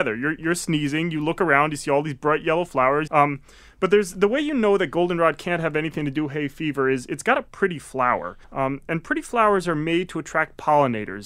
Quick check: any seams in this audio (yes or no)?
yes